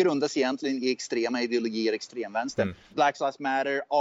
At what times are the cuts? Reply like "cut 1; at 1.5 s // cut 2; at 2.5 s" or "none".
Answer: cut 1; at 2.9 s